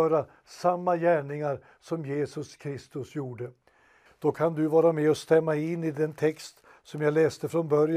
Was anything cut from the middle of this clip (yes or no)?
yes